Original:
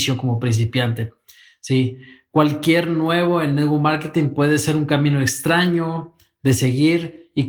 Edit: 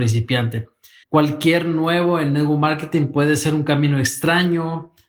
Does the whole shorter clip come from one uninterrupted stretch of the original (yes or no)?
no